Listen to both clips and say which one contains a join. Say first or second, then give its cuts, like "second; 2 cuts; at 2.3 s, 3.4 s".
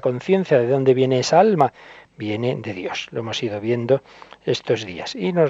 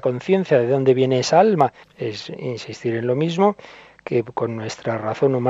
second; 1 cut; at 1.8 s